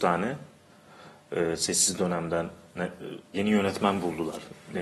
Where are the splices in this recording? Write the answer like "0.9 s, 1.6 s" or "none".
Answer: 3.3 s